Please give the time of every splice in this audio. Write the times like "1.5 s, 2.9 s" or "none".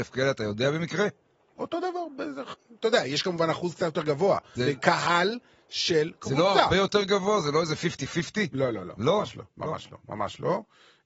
4.6 s